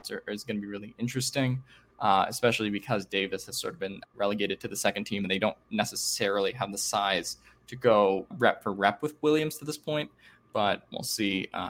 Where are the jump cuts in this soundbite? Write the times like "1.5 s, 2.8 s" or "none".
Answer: 4.1 s, 8.3 s